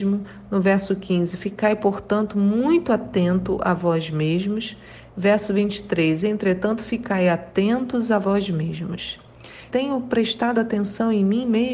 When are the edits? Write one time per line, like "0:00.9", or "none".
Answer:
0:09.7